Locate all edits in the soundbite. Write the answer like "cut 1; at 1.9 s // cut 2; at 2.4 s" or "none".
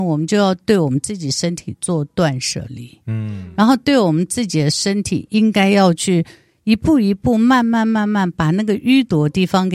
none